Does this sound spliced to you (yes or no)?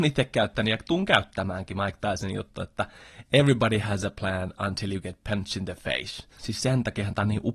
yes